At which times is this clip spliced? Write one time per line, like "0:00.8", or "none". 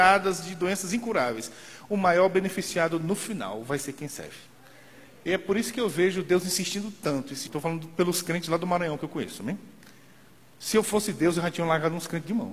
0:07.5